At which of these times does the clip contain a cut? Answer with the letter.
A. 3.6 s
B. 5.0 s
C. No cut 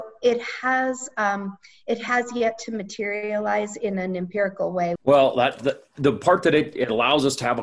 B